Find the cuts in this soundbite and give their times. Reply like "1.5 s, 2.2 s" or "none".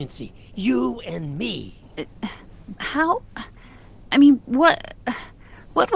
2.7 s